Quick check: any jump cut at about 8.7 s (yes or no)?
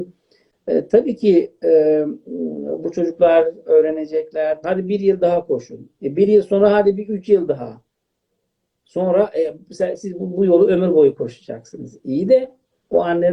no